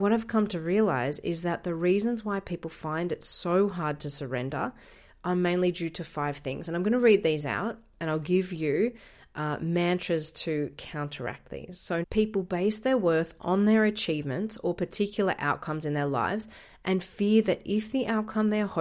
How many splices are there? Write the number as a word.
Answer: one